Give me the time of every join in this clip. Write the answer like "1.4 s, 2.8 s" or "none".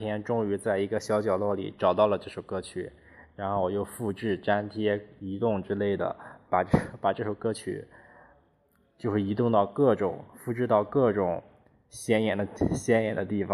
none